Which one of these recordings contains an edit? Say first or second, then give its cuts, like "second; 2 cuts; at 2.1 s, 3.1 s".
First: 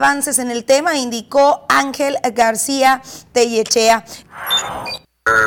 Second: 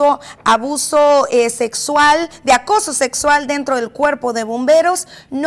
first; 1 cut; at 4.2 s